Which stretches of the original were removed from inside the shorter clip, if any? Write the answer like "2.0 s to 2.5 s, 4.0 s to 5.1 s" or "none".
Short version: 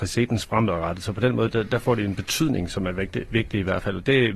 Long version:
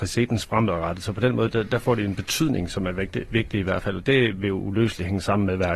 none